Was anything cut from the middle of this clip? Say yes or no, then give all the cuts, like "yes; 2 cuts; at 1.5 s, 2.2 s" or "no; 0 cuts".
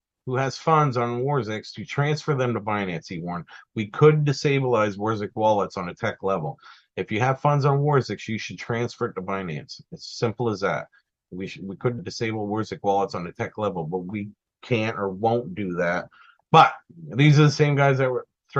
yes; 2 cuts; at 12.0 s, 16.4 s